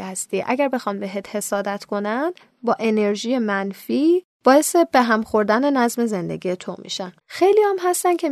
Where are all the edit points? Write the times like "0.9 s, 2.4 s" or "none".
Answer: 7.2 s

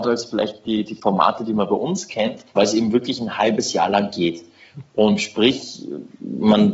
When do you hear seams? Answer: 2.5 s

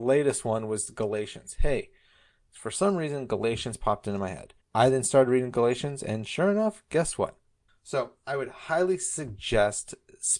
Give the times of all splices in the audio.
4.6 s, 7.7 s

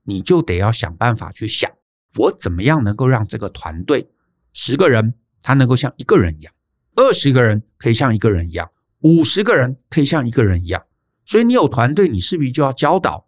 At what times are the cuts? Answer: none

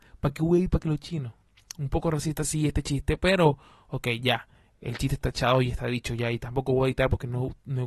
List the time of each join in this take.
none

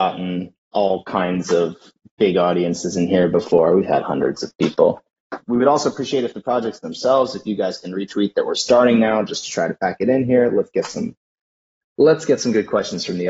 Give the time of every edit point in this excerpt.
5.4 s

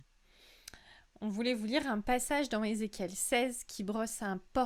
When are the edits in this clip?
none

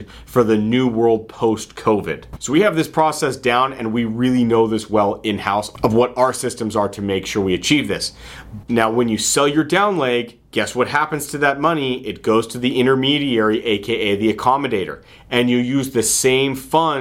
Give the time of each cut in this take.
2.4 s, 8.6 s

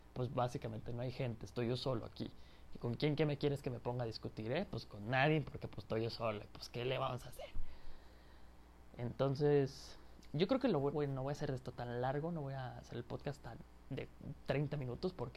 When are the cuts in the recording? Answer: 10.9 s

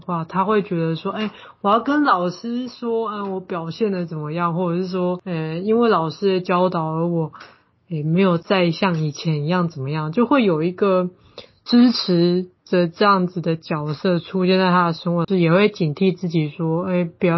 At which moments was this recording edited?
12.6 s, 15.2 s

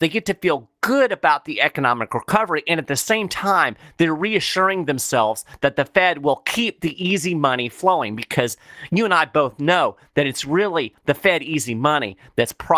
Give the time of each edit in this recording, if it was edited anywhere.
none

